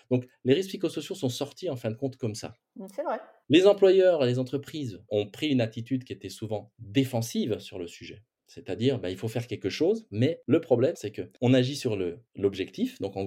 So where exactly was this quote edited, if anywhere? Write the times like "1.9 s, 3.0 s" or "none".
5.1 s, 10.9 s

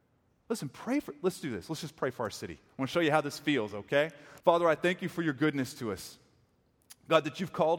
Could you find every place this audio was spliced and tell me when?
4.4 s

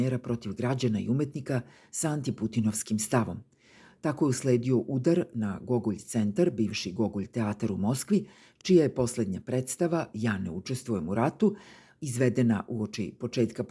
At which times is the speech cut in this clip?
none

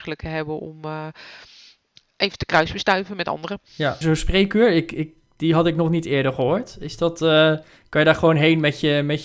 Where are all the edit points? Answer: 4.0 s

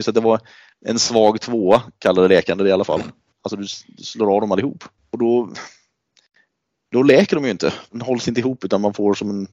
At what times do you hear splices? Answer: 3.3 s, 7.9 s

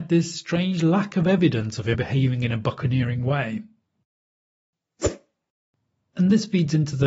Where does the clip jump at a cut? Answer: 1.9 s

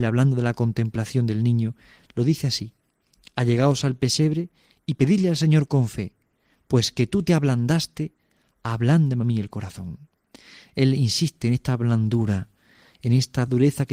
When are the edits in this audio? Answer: none

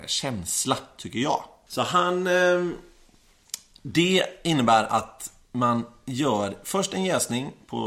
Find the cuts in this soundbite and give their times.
1.7 s

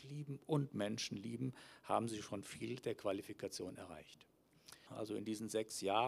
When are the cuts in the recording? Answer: 4.9 s

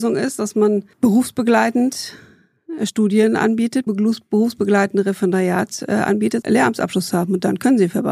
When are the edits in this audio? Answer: 0.9 s, 3.9 s, 6.4 s

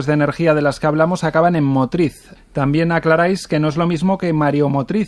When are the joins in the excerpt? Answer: 2.4 s

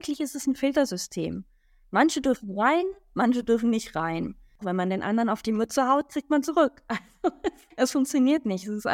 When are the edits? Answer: 4.6 s

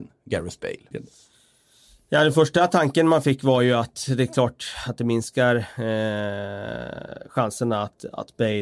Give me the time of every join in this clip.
0.9 s

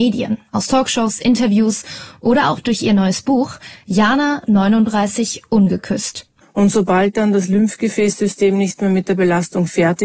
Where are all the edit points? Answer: 6.4 s

